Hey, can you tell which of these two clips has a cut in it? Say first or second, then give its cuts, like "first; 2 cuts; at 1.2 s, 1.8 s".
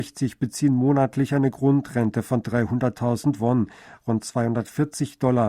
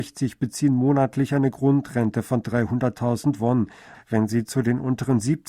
second; 1 cut; at 3.9 s